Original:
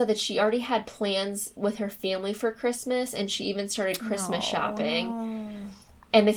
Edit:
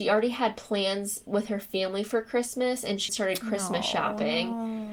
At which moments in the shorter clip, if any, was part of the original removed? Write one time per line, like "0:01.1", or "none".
0:03.1